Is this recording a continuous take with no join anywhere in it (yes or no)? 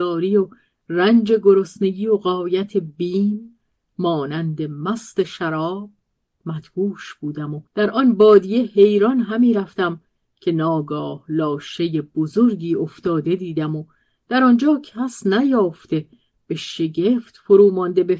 no